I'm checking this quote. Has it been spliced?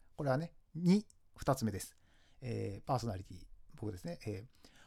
no; 0 cuts

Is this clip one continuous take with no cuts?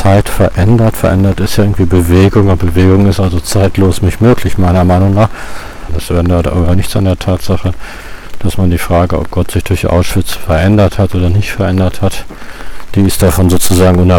no; 1 cut; at 5.9 s

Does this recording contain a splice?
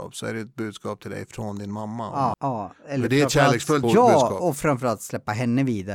yes; 2 cuts; at 2.3 s, 3.8 s

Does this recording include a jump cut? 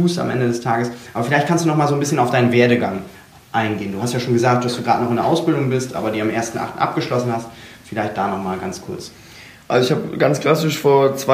no; 0 cuts

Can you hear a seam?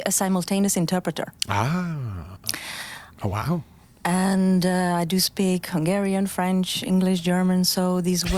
yes; 1 cut; at 3.2 s

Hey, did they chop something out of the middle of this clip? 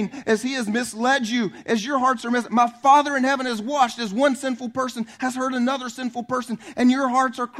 no; 0 cuts

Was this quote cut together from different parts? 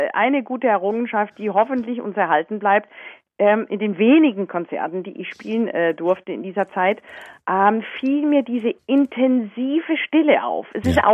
no; 0 cuts

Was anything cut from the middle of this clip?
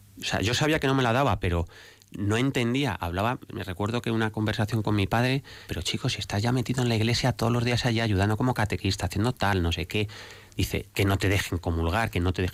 yes; 2 cuts; at 5.7 s, 10.9 s

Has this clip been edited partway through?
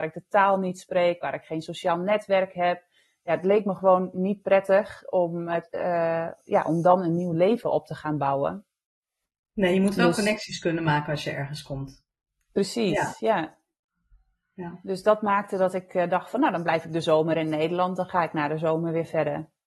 no; 0 cuts

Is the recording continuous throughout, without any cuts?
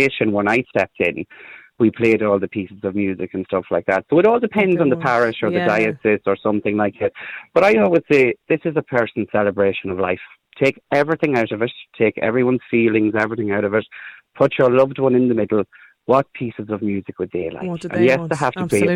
yes; 0 cuts

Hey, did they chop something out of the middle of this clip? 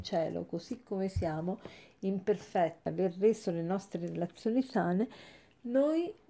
yes; 1 cut; at 2.9 s

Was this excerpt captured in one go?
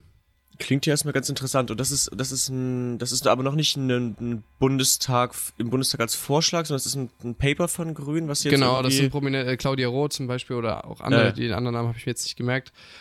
yes; 0 cuts

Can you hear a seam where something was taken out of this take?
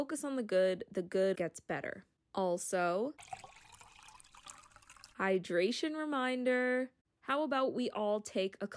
yes; 1 cut; at 1.3 s

